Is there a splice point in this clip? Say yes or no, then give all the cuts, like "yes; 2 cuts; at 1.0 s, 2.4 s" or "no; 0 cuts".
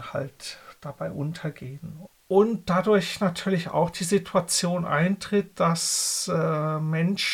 yes; 1 cut; at 2.1 s